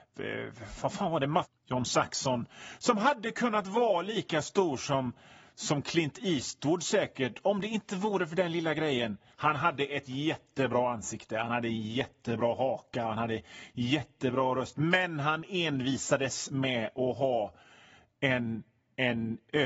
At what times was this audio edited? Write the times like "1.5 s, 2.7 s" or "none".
1.4 s

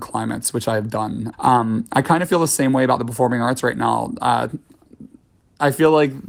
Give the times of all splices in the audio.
1.3 s

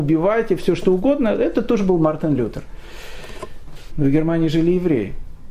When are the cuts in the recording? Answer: 3.9 s

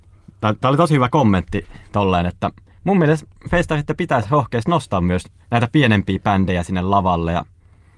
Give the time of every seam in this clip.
none

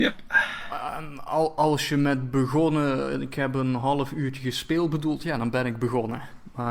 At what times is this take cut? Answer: none

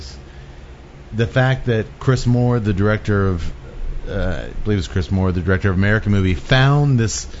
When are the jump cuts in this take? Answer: none

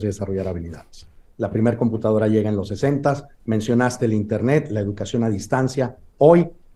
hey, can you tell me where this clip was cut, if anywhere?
1.3 s, 3.4 s

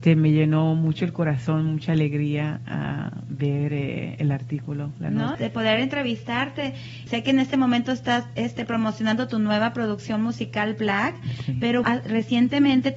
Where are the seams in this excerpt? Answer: 5.3 s, 7.1 s, 11.8 s

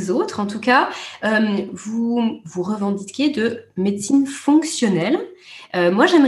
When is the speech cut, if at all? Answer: none

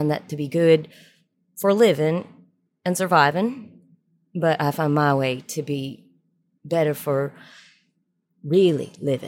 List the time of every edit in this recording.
none

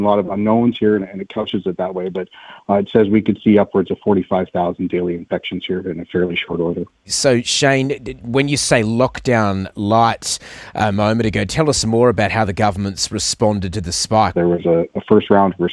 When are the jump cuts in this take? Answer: 7.0 s, 14.3 s

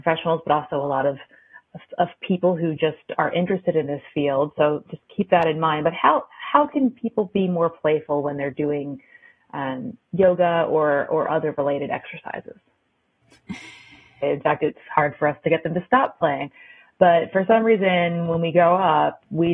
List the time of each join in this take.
14.2 s

